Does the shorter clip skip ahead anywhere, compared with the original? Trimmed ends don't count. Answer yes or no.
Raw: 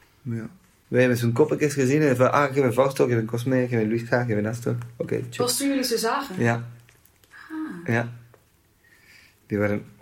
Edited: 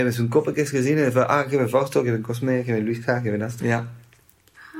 yes